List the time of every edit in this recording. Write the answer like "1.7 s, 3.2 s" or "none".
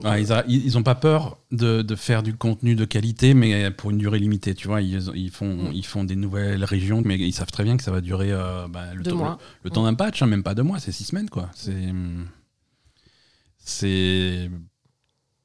7.0 s